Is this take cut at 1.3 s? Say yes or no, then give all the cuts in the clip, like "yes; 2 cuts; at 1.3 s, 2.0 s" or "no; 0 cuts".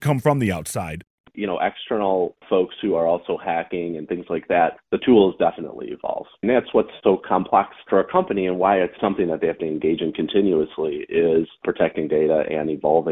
yes; 1 cut; at 1.3 s